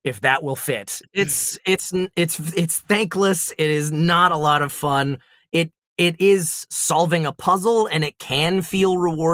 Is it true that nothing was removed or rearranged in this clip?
no; 1 cut; at 1.0 s

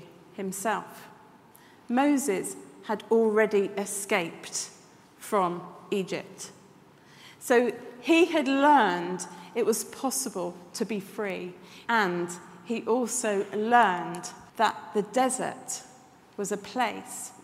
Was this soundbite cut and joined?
yes; 2 cuts; at 11.9 s, 14.5 s

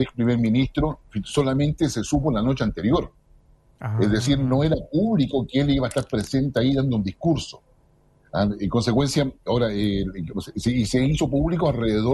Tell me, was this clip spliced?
no; 0 cuts

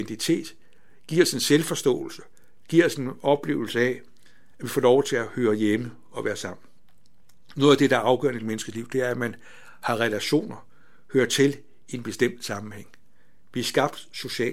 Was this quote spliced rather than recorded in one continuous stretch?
no; 0 cuts

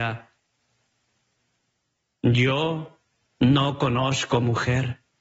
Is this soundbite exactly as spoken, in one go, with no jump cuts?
yes; 0 cuts

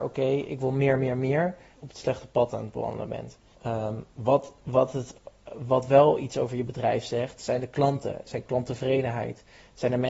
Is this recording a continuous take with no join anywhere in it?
no; 2 cuts; at 1.8 s, 3.5 s

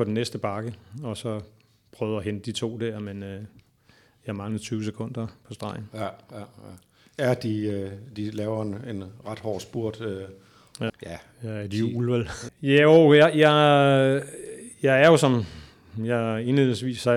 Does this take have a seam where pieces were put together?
yes; 2 cuts; at 10.9 s, 12.5 s

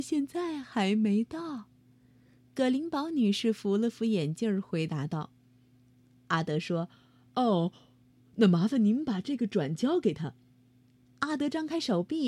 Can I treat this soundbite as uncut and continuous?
yes; 0 cuts

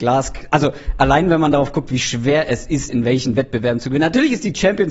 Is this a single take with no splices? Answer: no; 1 cut; at 2.9 s

